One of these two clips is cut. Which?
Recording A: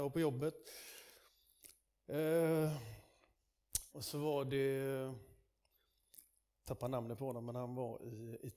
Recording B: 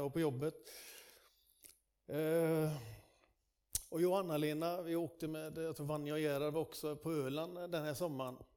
A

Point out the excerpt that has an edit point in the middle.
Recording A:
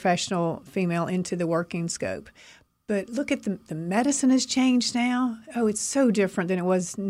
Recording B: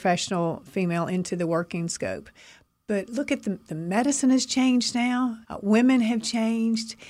B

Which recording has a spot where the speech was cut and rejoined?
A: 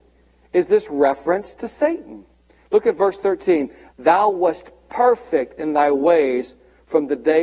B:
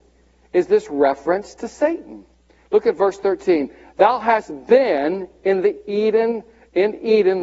A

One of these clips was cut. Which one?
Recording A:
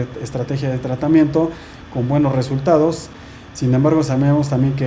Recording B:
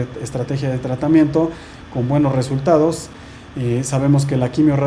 A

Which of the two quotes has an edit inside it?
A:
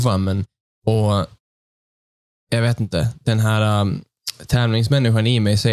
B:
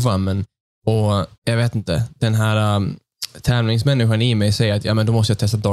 B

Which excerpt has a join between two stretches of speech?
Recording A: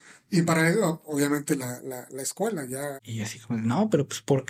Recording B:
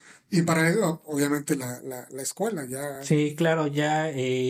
A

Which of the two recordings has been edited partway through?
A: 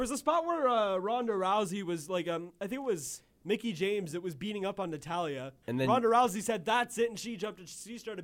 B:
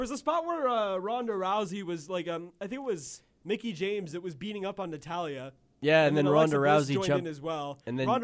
A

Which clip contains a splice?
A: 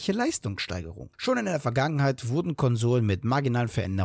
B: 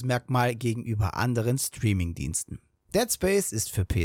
B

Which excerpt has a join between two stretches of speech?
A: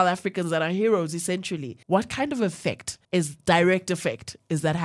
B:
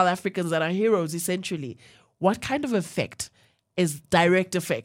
A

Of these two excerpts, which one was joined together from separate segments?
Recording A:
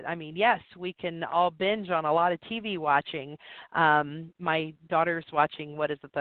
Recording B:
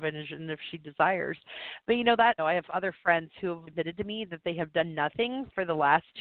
B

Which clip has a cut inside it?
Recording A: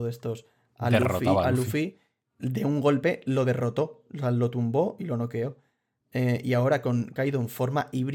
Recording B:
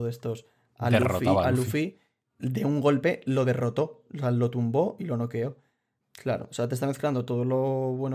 B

